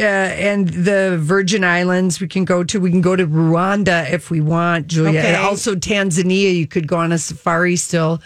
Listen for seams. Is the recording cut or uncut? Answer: uncut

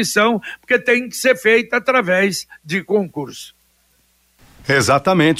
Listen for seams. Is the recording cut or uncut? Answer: uncut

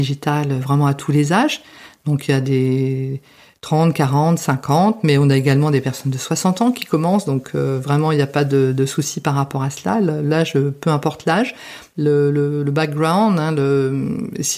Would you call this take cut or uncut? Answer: cut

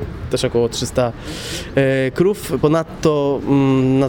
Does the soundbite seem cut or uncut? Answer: uncut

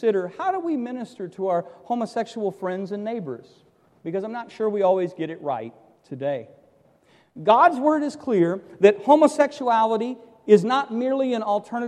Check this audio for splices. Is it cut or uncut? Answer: uncut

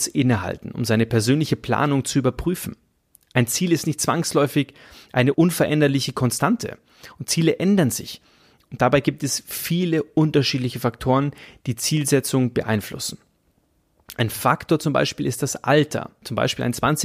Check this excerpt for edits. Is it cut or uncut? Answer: uncut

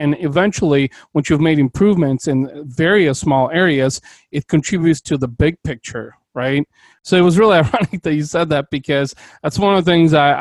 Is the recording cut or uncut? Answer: cut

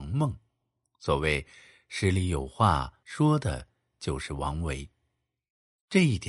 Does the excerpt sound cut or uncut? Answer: cut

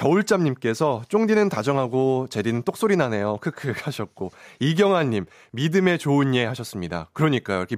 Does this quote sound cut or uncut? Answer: uncut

